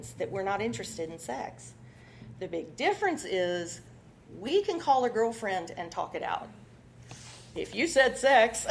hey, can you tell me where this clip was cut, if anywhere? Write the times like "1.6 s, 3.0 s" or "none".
7.5 s